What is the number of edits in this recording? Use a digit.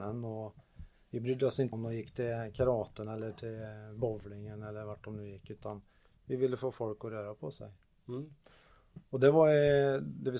1